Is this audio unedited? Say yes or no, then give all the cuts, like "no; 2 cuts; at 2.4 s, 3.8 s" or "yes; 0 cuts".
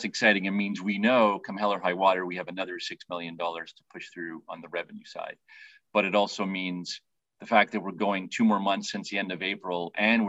yes; 0 cuts